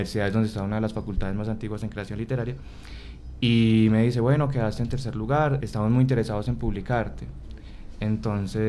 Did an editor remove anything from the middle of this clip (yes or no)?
yes